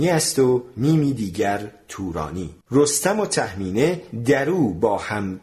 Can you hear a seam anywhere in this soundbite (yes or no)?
yes